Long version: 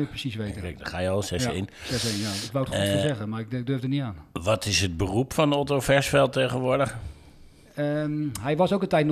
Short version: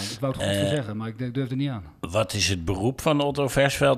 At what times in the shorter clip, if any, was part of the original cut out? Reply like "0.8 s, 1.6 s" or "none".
none